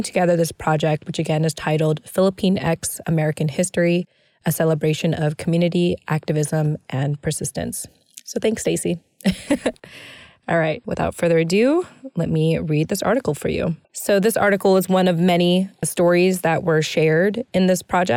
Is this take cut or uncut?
cut